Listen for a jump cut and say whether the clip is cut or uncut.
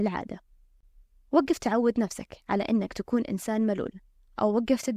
uncut